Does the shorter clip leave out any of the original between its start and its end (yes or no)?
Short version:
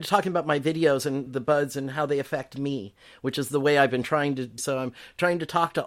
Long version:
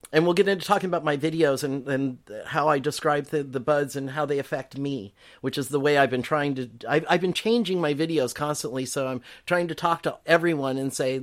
yes